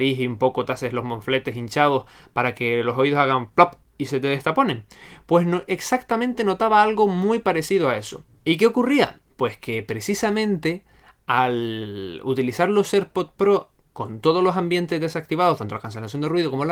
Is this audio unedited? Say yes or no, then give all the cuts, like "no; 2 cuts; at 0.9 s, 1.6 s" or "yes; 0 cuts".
yes; 0 cuts